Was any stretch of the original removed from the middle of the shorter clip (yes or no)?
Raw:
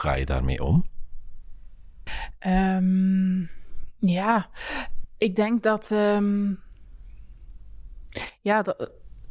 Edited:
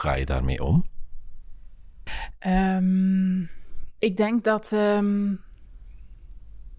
yes